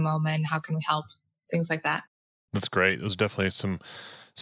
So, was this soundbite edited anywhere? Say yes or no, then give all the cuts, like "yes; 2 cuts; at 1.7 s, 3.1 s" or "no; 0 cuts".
no; 0 cuts